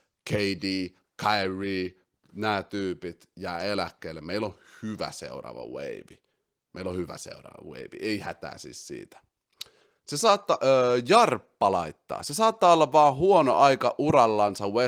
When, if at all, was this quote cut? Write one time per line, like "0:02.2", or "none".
0:01.0